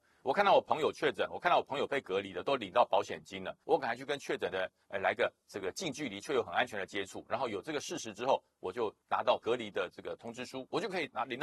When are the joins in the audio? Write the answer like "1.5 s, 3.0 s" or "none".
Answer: 3.6 s